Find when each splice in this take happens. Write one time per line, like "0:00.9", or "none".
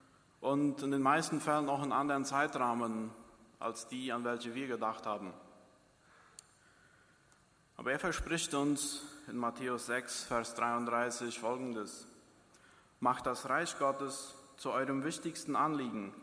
none